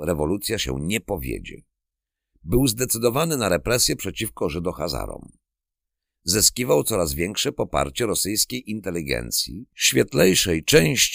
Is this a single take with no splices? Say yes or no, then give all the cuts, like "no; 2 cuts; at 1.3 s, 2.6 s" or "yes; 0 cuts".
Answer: yes; 0 cuts